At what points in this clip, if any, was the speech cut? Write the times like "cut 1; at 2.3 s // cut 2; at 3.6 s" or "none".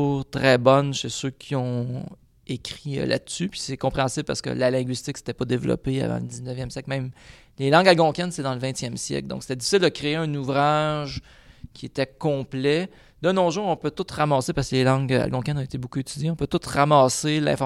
none